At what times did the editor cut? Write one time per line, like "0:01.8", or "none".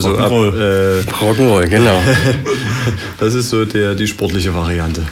none